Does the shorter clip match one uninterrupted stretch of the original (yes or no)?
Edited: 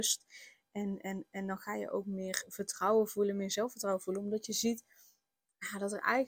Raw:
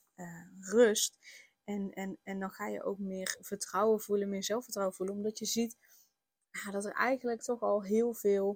yes